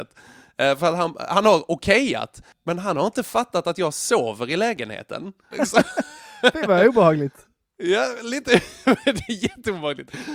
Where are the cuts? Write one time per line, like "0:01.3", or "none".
0:05.5

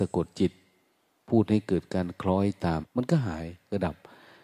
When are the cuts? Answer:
0:02.8

